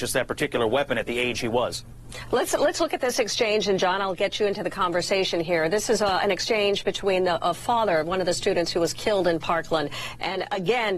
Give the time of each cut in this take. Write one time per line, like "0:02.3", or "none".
none